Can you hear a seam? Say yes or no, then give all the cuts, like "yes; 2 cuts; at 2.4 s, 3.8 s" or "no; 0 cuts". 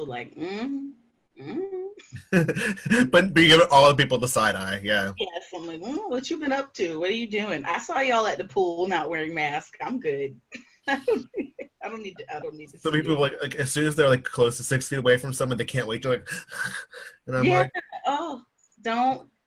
no; 0 cuts